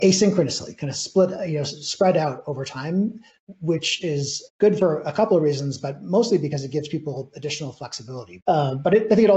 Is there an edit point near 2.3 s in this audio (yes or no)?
no